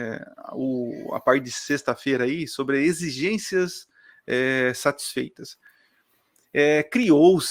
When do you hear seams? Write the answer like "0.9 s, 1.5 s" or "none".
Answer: none